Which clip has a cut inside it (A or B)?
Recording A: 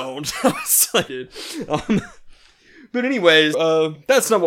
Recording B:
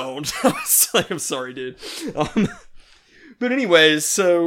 A